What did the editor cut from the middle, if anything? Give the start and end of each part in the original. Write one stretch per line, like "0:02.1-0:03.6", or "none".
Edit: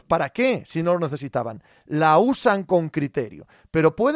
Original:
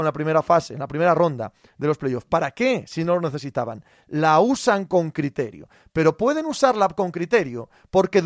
none